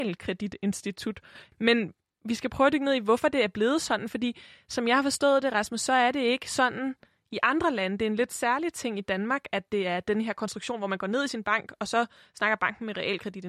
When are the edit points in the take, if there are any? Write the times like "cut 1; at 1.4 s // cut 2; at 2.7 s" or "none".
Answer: cut 1; at 1.5 s